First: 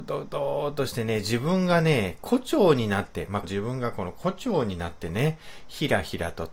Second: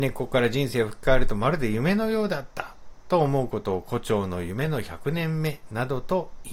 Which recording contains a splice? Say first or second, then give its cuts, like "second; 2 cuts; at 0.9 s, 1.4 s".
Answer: first; 1 cut; at 3.4 s